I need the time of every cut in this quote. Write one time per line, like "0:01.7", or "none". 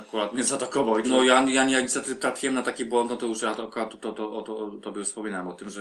0:01.0